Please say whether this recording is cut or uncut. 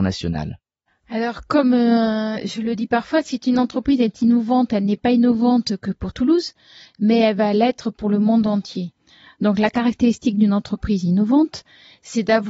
uncut